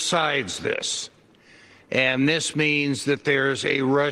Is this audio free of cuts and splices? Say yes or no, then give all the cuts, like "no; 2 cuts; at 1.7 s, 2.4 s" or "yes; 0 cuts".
yes; 0 cuts